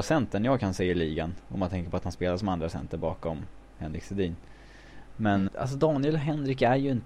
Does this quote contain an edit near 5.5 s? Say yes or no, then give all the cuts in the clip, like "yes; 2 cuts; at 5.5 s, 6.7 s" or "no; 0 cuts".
yes; 1 cut; at 5.5 s